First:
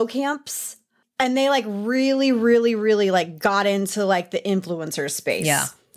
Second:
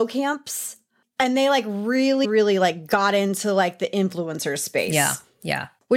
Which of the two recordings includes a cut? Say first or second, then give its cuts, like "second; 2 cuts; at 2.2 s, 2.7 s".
second; 1 cut; at 2.2 s